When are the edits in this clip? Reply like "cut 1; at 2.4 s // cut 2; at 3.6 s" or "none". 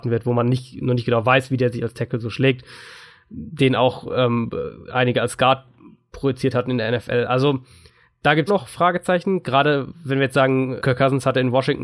cut 1; at 8.5 s // cut 2; at 10.8 s